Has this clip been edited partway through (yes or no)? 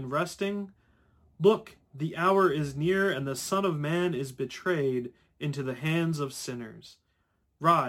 no